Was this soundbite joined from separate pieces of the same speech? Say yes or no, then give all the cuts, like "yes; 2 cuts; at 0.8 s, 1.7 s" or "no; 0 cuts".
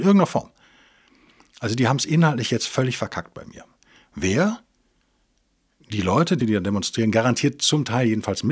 yes; 1 cut; at 6.4 s